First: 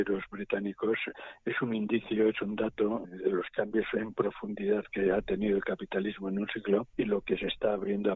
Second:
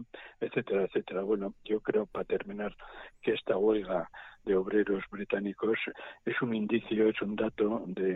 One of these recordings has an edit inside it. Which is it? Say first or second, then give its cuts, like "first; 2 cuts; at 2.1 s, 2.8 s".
first; 2 cuts; at 3.0 s, 6.9 s